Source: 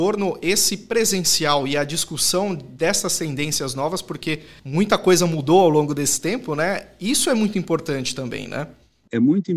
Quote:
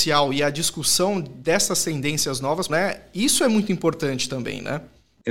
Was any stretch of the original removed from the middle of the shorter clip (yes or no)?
yes